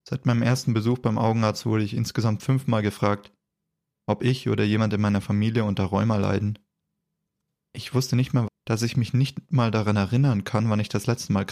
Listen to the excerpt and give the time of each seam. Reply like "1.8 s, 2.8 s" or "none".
8.5 s